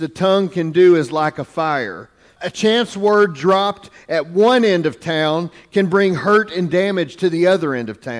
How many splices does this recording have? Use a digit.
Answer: 1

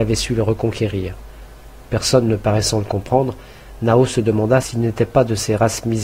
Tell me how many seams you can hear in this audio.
0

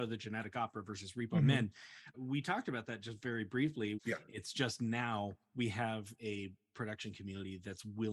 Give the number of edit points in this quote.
2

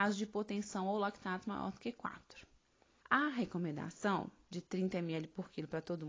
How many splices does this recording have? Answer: 0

